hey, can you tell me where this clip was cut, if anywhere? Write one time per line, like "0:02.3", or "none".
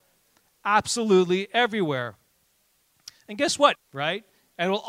0:03.7